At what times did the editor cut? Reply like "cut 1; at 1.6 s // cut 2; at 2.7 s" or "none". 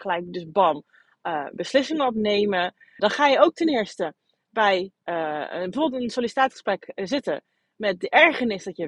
cut 1; at 3.0 s

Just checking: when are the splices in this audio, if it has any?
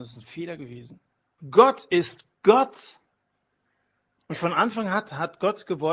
cut 1; at 1.4 s

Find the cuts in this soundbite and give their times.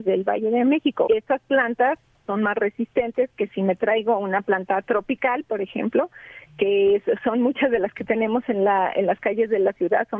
cut 1; at 1.1 s

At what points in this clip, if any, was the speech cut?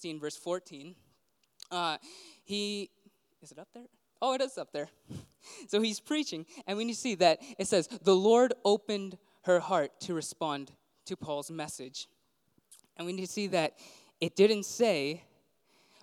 none

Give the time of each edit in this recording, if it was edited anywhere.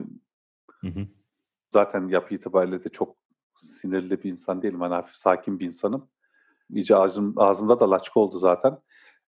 cut 1; at 1.7 s // cut 2; at 6.7 s

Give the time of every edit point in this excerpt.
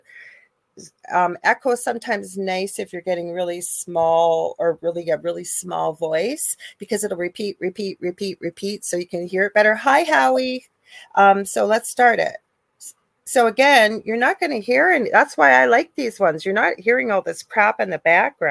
cut 1; at 1.0 s

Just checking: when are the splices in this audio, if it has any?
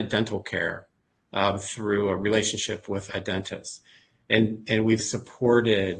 cut 1; at 3.1 s // cut 2; at 5.0 s

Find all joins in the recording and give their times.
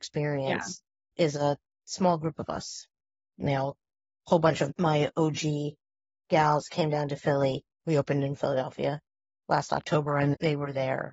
cut 1; at 3.4 s

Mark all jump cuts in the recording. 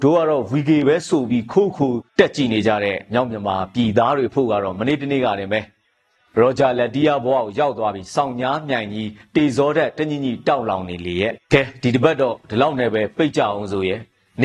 cut 1; at 2.1 s // cut 2; at 11.4 s

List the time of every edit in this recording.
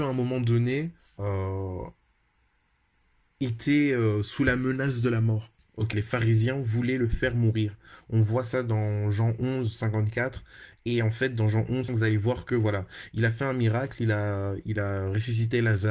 cut 1; at 5.9 s // cut 2; at 11.9 s

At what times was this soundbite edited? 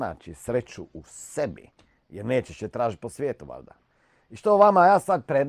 none

